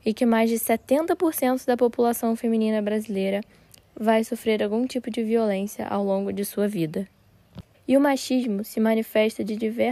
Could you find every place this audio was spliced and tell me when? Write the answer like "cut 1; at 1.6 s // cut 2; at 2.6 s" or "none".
cut 1; at 7.7 s